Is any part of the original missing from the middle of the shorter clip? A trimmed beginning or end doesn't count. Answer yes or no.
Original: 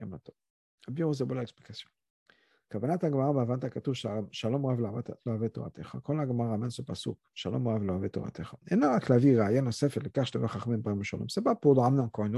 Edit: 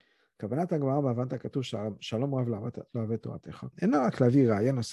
yes